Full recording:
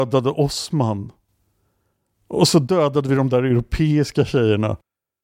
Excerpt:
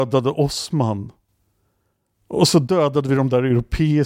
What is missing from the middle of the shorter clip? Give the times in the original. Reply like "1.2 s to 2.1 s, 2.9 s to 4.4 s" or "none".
none